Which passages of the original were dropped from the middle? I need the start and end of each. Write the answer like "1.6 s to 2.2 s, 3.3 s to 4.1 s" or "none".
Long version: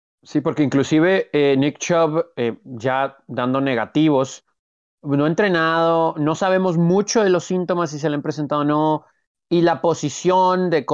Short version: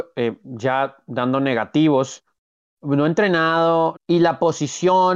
6.1 s to 9.4 s

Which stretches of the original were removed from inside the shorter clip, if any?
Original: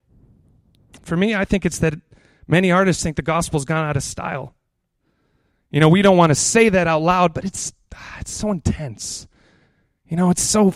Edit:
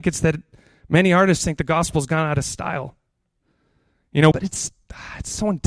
5.9 s to 7.3 s

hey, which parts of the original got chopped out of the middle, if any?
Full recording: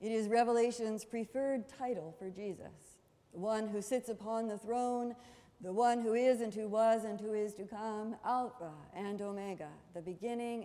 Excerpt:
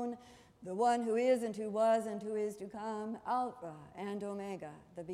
none

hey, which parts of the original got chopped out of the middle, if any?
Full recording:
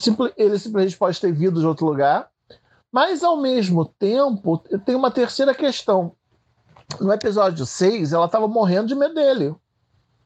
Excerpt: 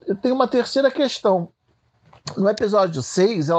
none

